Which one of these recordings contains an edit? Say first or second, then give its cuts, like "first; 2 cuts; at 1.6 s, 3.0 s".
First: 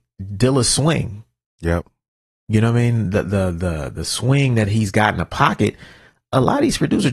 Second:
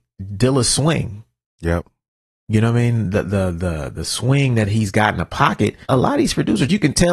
second; 1 cut; at 5.8 s